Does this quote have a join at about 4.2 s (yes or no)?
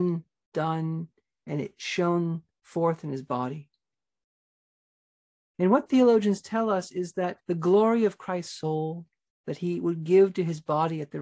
no